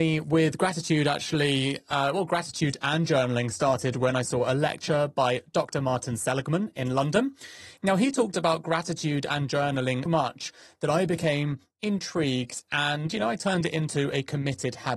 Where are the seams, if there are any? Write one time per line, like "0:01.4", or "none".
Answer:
0:07.8
0:10.1